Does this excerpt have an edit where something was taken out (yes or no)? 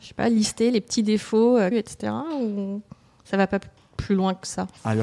yes